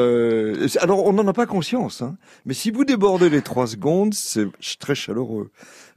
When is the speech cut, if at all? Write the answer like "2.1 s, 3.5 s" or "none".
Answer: none